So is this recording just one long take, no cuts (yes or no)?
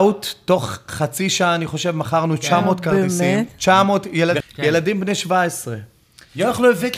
no